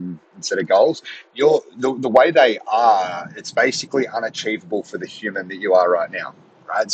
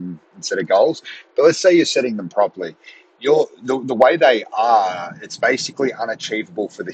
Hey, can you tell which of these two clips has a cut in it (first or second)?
first